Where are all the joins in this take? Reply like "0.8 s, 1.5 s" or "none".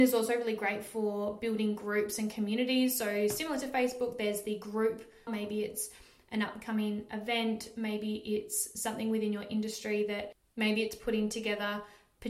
5.3 s